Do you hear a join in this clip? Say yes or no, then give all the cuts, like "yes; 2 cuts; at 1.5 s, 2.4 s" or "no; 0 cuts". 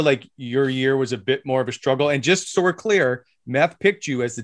no; 0 cuts